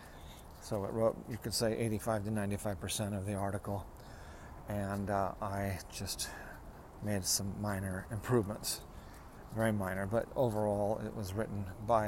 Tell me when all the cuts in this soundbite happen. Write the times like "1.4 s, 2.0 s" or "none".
none